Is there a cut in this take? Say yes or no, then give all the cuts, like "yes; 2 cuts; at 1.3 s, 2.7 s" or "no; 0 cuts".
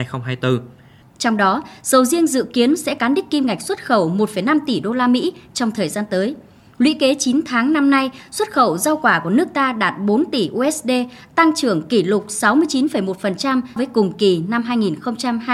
yes; 3 cuts; at 1.0 s, 6.7 s, 13.8 s